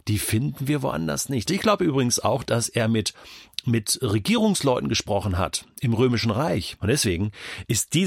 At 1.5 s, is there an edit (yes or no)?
yes